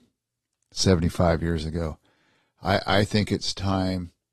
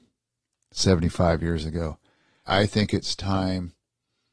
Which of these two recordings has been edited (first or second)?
second